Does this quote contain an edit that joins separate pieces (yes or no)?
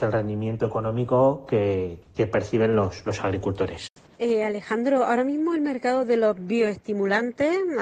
yes